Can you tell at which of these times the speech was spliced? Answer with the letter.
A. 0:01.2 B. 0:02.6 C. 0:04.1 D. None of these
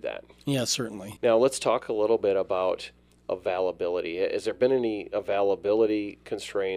A